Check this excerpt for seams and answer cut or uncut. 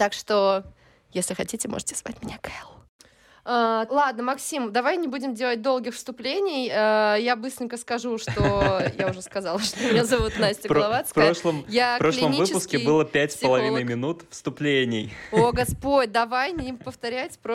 cut